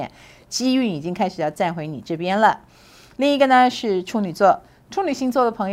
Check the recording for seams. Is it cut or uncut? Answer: uncut